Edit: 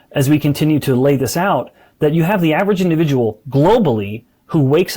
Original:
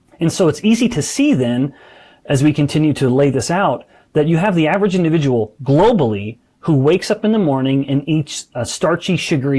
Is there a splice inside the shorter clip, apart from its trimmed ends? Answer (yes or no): no